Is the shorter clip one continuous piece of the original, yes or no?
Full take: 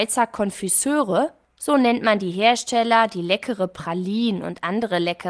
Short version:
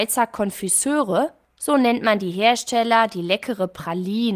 yes